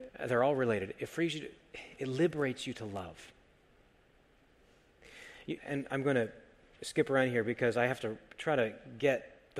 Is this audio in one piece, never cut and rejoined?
no; 2 cuts; at 2.0 s, 5.6 s

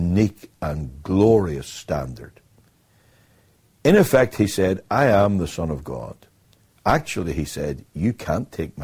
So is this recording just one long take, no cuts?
no; 1 cut; at 6.7 s

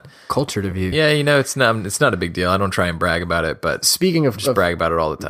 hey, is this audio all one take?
yes; 0 cuts

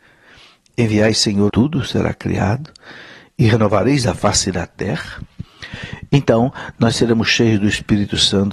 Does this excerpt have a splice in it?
yes; 1 cut; at 1.5 s

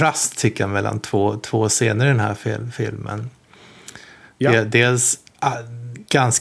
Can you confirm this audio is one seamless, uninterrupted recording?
yes; 0 cuts

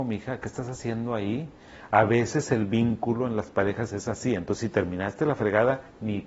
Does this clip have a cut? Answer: no; 0 cuts

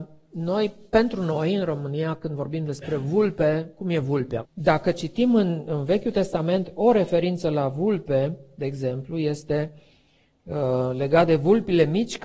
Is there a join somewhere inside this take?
yes; 1 cut; at 4.4 s

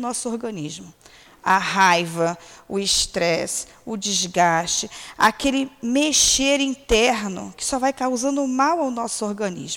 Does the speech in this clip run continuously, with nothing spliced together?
yes; 0 cuts

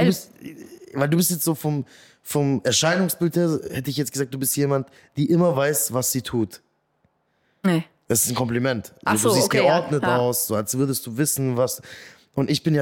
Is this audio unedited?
yes; 0 cuts

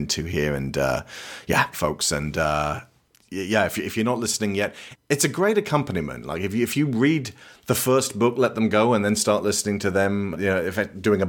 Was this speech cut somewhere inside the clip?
yes; 2 cuts; at 1.7 s, 10.3 s

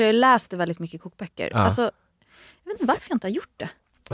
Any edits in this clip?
no; 0 cuts

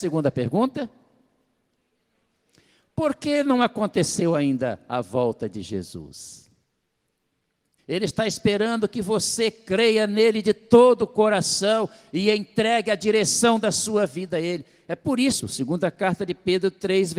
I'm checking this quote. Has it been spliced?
yes; 2 cuts; at 7.8 s, 15.4 s

